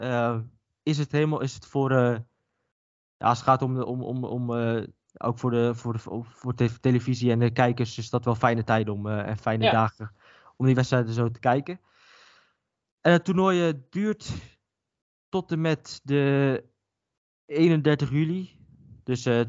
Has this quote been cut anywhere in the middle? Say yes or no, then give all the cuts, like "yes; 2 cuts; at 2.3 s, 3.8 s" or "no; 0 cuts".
no; 0 cuts